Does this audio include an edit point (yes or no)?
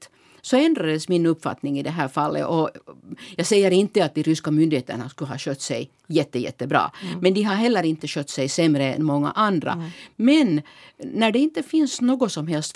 no